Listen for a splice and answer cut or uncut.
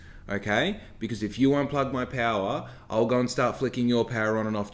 uncut